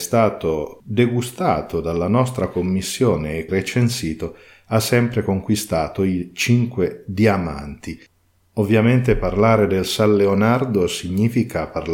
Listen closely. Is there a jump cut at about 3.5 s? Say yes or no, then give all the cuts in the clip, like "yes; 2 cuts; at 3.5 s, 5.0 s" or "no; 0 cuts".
yes; 1 cut; at 3.5 s